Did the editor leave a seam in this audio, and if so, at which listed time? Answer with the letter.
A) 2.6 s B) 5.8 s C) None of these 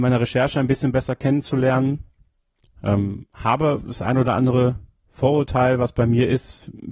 C